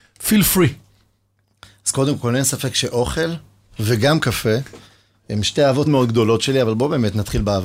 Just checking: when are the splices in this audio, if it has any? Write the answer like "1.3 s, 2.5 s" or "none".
5.9 s